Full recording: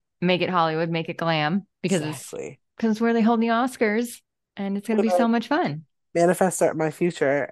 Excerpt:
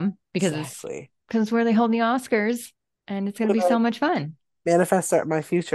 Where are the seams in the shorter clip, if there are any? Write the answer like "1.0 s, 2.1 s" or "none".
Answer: none